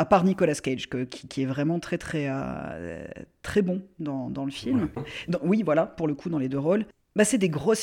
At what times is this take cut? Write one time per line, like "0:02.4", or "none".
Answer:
0:01.3
0:05.0